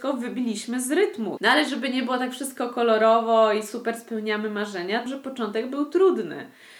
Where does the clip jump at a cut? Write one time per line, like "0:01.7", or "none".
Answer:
0:01.4
0:05.1